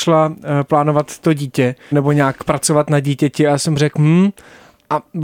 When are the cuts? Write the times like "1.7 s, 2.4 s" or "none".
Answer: 1.9 s